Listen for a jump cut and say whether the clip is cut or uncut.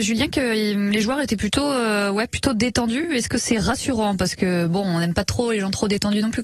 uncut